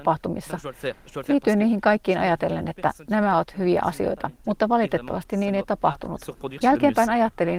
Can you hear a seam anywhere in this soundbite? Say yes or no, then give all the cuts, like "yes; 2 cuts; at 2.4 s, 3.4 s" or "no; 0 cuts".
yes; 2 cuts; at 4.4 s, 6.6 s